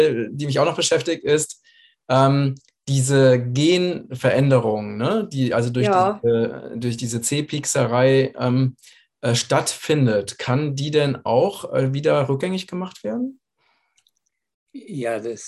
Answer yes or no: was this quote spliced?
no